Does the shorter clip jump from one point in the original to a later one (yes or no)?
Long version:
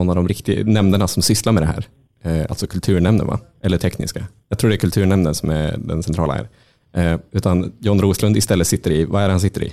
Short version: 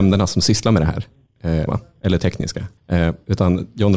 yes